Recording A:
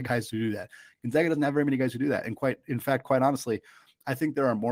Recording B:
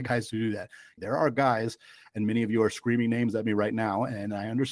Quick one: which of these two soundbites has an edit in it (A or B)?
B